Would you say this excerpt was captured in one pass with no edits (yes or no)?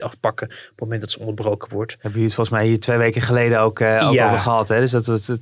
yes